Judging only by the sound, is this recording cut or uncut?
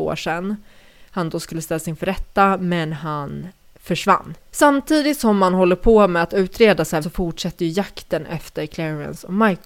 cut